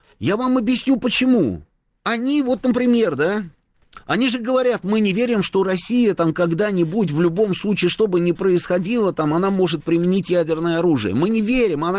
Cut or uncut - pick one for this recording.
uncut